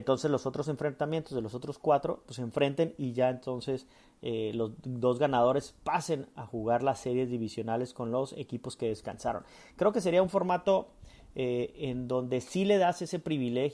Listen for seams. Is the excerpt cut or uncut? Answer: uncut